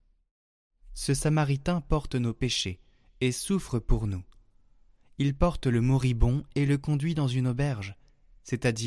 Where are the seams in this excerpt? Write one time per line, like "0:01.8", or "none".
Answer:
none

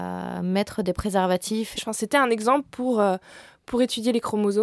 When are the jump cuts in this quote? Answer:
0:01.8

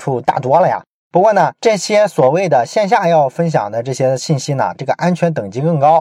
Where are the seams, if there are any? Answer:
0:01.0
0:04.8

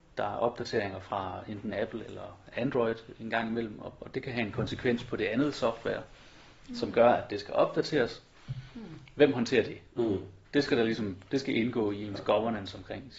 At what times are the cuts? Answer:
0:10.4

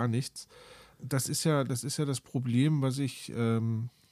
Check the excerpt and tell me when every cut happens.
0:00.9

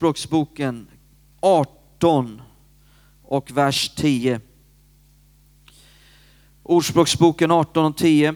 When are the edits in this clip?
none

